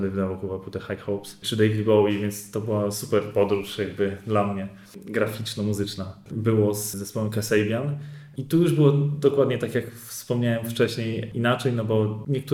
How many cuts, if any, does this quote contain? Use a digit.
1